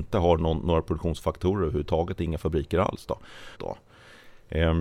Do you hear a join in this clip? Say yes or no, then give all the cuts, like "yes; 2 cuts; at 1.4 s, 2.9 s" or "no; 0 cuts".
yes; 1 cut; at 3.5 s